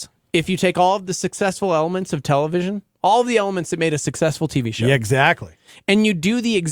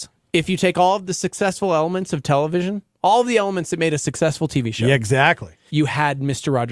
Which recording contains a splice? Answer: second; 1 cut; at 5.7 s

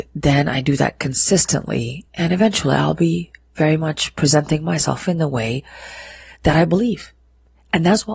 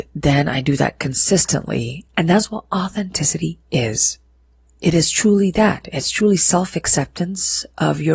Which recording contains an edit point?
second; 1 cut; at 2.1 s

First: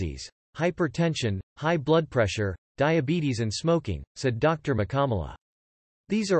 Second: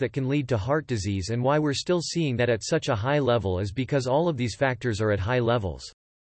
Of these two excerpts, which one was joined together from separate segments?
first; 1 cut; at 2.6 s

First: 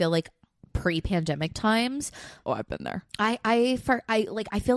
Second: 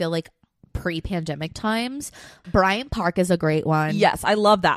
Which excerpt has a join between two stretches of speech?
second; 1 cut; at 2.4 s

